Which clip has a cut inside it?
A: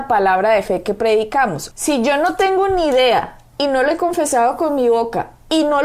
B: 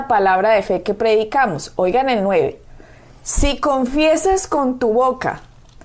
A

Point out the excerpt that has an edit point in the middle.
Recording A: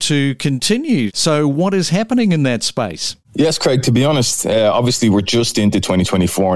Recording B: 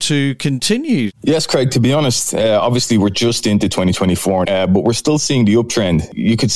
B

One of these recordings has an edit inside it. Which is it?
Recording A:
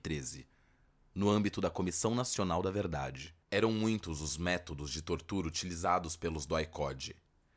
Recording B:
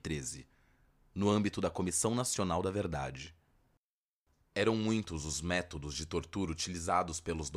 A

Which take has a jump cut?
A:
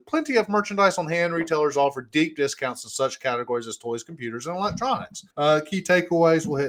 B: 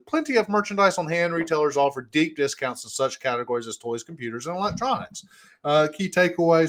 A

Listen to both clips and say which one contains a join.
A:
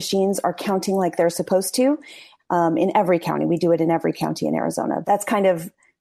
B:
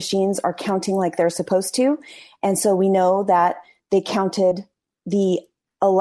A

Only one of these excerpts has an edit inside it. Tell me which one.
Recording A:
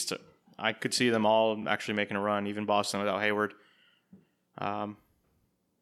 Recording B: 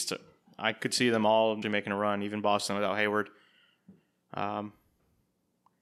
B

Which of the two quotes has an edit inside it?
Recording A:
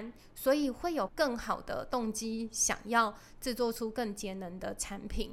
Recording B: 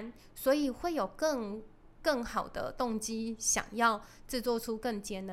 A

